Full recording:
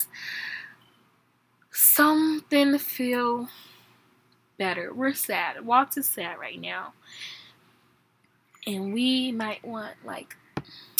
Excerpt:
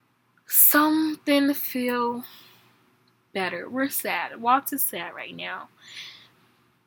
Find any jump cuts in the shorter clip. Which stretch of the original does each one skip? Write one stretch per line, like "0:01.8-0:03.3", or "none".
none